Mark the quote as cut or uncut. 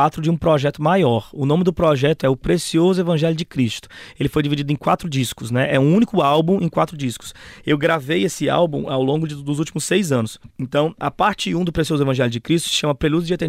cut